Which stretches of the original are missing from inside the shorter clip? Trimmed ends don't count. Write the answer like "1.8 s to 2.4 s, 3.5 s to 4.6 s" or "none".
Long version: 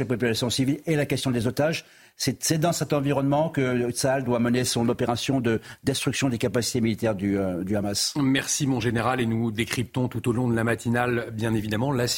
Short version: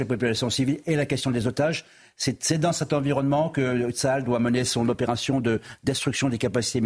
none